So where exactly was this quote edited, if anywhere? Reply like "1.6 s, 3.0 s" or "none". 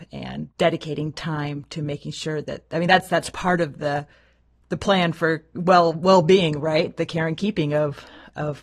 none

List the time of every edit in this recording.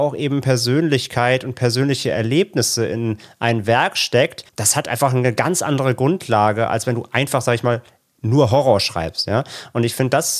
4.5 s

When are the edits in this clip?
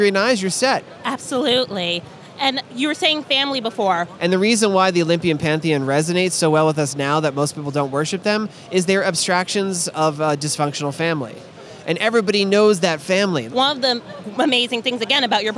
0.9 s, 4.2 s, 13.5 s

